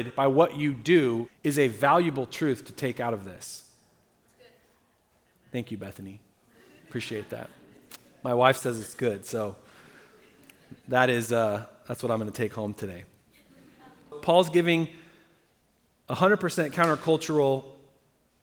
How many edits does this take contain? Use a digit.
2